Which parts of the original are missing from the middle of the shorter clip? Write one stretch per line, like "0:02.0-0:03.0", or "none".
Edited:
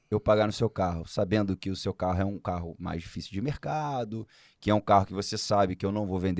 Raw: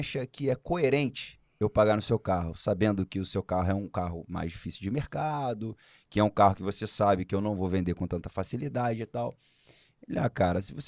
none

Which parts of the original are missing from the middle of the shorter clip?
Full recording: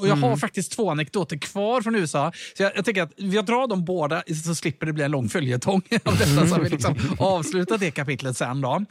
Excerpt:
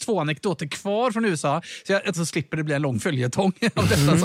0:02.8-0:04.4

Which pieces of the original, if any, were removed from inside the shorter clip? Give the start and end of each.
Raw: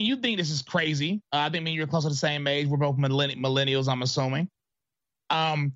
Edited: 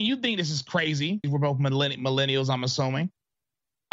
0:01.2-0:02.6

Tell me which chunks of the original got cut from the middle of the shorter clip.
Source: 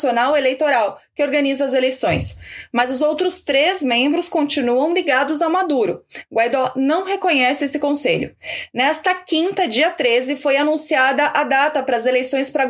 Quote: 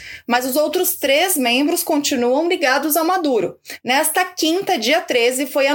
0:06.3-0:08.7

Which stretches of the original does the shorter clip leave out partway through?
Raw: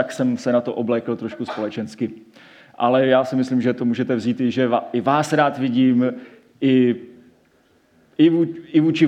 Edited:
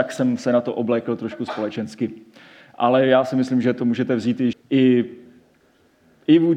0:04.5-0:06.4

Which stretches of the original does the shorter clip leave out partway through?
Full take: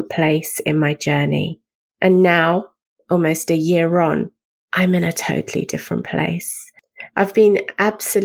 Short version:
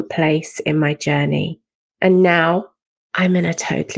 0:03.0-0:04.6

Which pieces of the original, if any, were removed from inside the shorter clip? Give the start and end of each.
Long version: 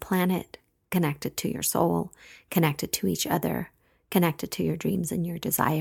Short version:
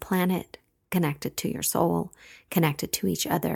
none

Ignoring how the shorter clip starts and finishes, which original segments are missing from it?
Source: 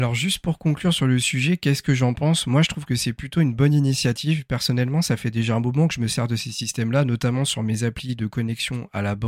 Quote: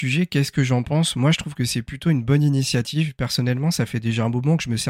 none

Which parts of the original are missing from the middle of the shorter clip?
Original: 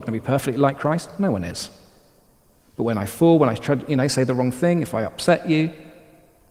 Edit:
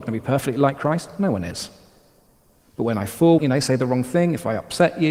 0:03.4-0:03.9

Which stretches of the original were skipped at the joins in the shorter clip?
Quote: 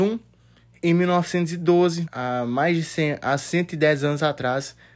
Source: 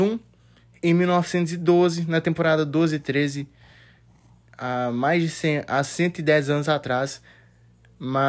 0:02.1-0:04.5

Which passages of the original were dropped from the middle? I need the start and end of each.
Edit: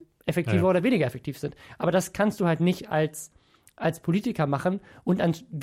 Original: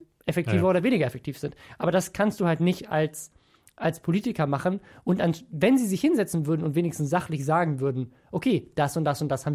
none

